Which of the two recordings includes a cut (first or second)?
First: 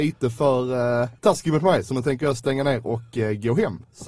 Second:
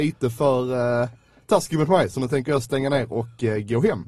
first